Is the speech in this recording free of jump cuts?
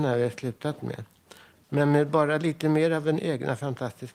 no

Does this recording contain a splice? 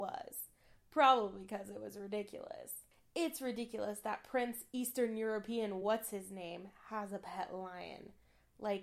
no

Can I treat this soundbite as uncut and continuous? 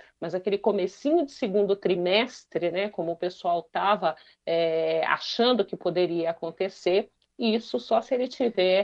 yes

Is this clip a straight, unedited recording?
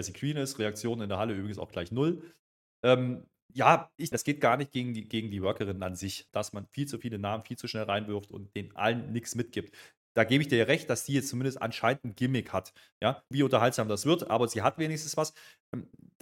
no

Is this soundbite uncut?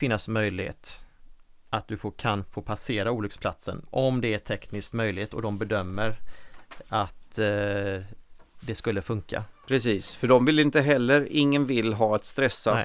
yes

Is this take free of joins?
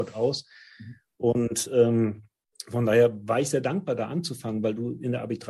yes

